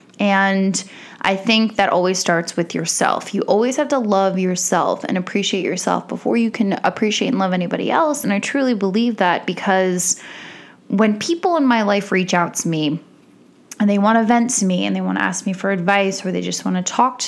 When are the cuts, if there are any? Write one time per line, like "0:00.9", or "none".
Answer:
none